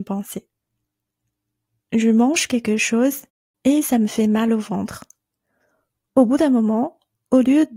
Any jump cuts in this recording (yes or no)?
no